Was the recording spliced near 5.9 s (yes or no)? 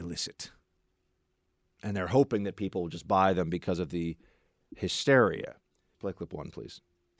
yes